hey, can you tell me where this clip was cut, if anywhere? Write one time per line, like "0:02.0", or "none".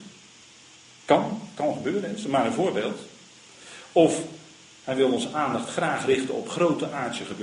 none